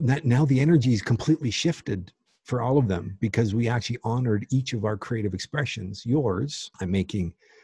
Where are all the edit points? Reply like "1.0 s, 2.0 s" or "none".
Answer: 6.7 s

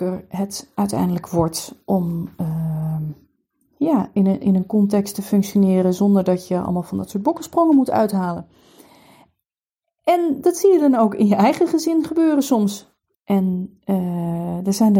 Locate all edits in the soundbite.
13.1 s

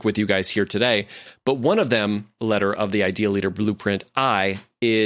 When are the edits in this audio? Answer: 2.4 s

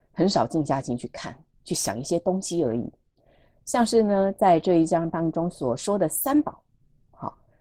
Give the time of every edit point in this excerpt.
none

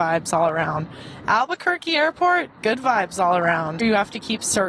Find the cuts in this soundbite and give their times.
3.8 s

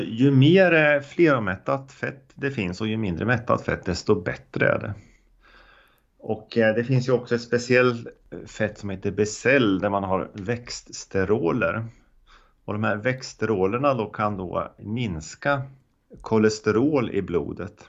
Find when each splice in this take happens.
none

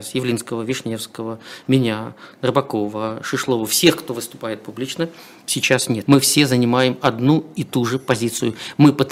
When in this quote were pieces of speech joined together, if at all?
6.1 s

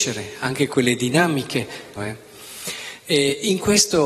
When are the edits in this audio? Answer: 2.0 s

